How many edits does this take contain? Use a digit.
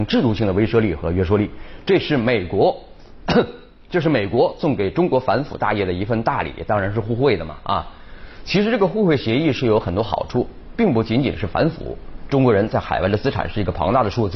1